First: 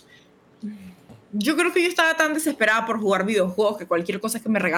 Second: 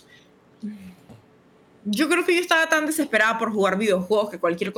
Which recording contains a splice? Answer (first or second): first